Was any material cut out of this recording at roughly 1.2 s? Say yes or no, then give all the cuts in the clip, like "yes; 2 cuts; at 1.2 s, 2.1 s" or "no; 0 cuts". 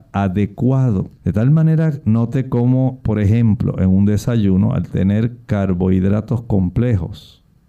yes; 1 cut; at 1.2 s